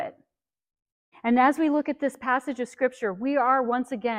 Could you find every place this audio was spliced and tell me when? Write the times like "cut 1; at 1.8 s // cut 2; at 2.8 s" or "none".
cut 1; at 1.1 s

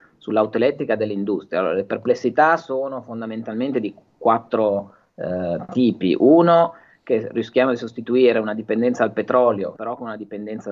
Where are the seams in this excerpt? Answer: cut 1; at 9.8 s

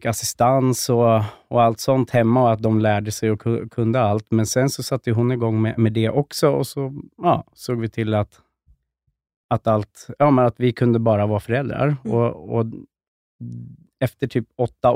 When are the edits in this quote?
none

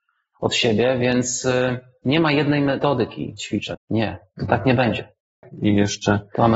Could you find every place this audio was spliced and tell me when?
cut 1; at 3.7 s // cut 2; at 5.4 s

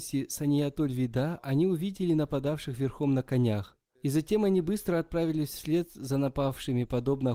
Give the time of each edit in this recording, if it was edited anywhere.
cut 1; at 4.0 s

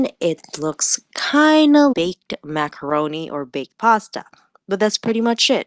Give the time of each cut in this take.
cut 1; at 1.9 s

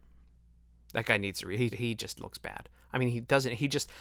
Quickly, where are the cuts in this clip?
cut 1; at 1.7 s

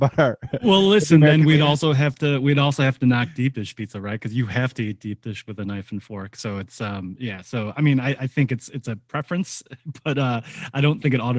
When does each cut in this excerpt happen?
none

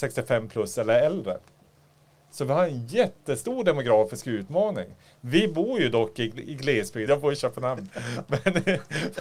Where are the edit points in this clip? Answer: cut 1; at 7.1 s

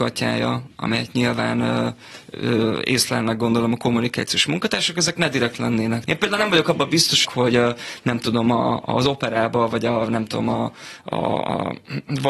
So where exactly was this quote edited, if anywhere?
cut 1; at 6.1 s // cut 2; at 7.2 s

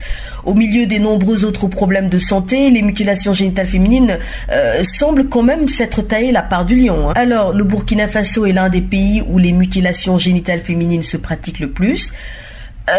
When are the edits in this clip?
cut 1; at 7.1 s

